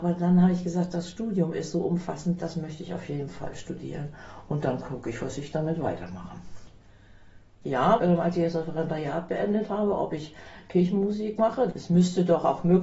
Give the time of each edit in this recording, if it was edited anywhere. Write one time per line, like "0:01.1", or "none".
0:08.0
0:11.7